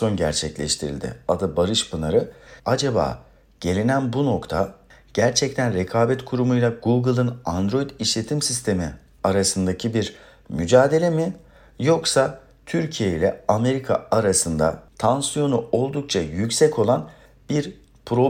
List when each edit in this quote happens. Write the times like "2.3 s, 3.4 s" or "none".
2.6 s